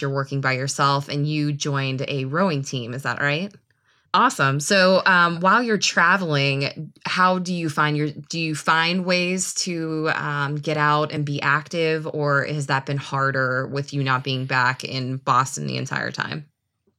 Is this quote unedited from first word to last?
no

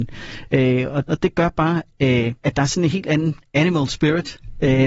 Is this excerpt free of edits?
no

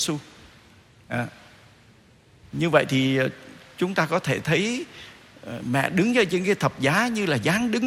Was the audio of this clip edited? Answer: no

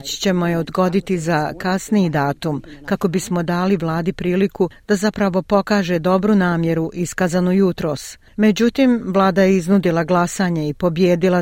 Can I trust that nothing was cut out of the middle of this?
no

